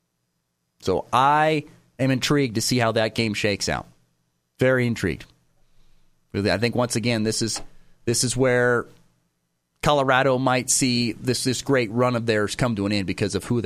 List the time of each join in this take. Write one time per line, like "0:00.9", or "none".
none